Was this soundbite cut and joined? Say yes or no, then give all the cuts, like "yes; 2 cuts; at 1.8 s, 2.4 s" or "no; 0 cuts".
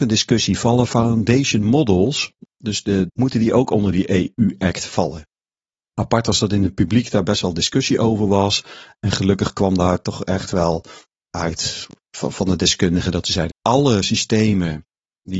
yes; 2 cuts; at 3.1 s, 13.5 s